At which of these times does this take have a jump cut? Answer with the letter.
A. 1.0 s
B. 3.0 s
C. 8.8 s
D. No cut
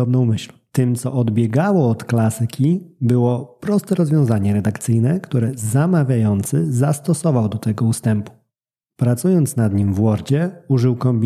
D